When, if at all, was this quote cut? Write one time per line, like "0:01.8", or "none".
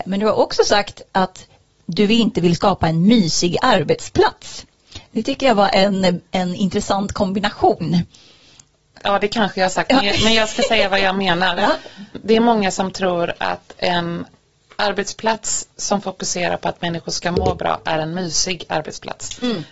none

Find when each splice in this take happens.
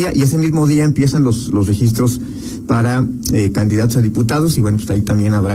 none

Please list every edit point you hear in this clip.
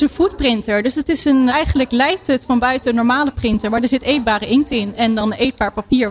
0:01.5

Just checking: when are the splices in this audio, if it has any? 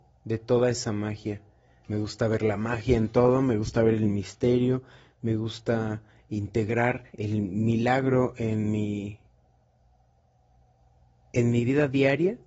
0:01.8
0:07.1

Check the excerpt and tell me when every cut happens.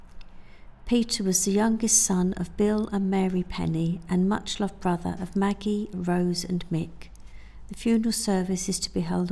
0:05.9

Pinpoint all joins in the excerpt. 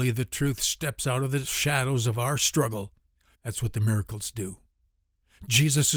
0:03.3

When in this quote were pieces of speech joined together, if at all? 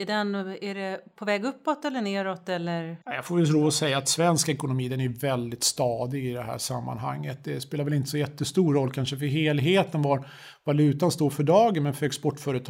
none

